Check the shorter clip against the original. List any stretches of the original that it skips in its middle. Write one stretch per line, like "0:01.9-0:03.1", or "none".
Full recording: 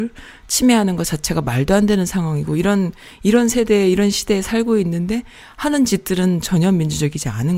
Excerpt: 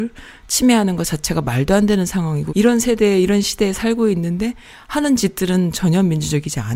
0:02.5-0:03.2

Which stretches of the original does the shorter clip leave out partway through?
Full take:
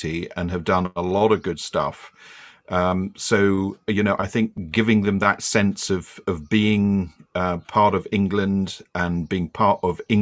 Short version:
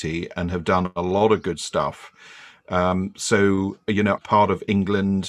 0:04.2-0:07.6

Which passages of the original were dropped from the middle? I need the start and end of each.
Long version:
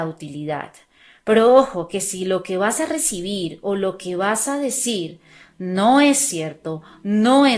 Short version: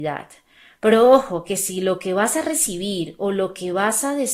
none

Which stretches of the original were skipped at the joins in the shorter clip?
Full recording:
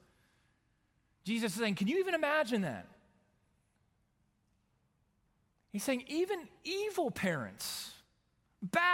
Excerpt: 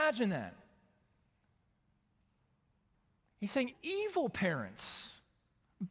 0:06.0-0:06.5

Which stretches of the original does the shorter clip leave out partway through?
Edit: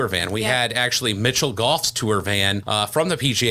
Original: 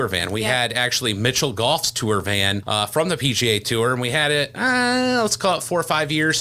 none

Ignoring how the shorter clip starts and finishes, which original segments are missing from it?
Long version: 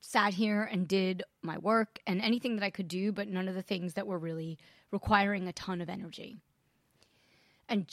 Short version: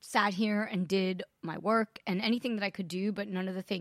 none

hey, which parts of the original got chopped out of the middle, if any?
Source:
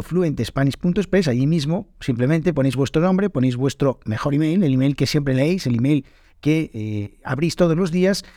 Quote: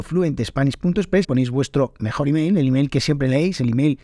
0:01.2-0:03.3

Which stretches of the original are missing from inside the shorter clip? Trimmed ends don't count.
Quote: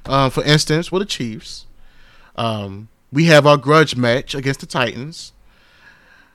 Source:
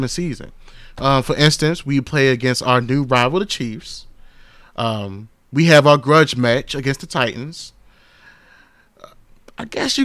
0:01.8-0:03.3

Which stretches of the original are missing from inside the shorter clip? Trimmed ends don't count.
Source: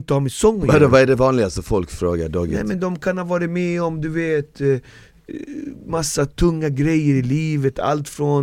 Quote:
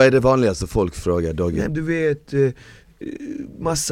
0:02.6-0:04.0

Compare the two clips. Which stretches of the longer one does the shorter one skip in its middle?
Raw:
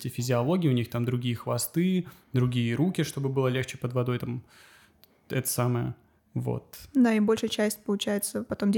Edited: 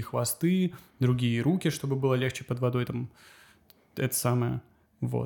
none

